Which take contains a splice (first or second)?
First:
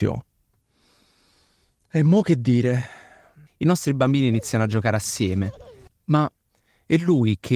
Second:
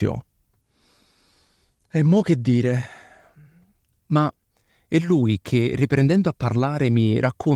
first